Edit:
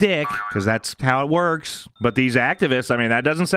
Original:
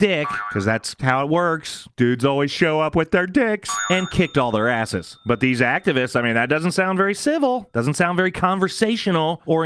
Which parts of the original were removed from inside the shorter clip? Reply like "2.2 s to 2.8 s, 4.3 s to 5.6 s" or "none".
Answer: 2.0 s to 5.2 s